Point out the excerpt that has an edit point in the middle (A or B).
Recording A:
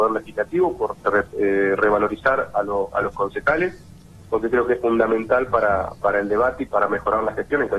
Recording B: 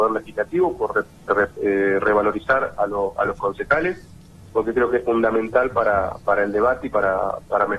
A